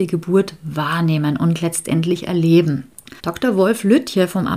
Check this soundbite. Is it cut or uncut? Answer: cut